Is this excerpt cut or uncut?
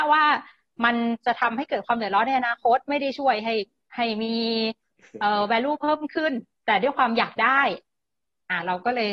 uncut